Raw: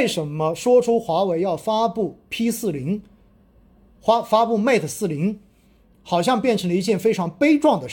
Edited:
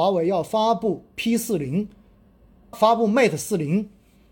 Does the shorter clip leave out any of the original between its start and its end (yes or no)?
yes